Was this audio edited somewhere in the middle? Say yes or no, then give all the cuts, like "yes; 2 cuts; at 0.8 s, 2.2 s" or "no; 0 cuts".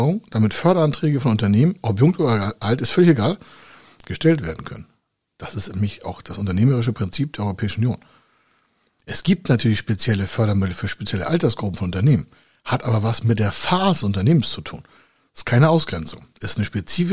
no; 0 cuts